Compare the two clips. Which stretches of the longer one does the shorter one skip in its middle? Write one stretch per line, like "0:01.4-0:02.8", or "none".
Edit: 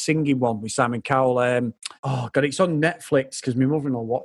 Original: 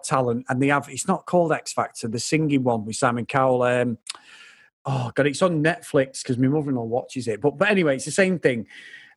0:04.2-0:04.8